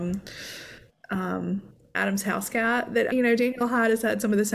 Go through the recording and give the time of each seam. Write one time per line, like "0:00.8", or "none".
0:03.1